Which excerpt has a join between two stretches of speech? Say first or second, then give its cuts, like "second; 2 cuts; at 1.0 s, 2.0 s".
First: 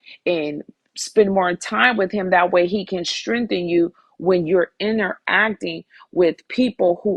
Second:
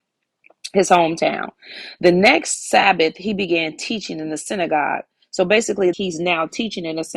second; 1 cut; at 5.9 s